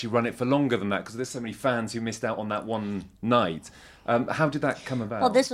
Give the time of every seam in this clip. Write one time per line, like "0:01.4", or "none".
none